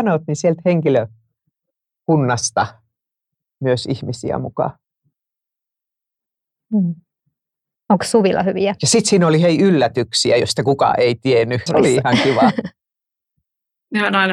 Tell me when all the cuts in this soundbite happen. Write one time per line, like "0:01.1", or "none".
0:11.7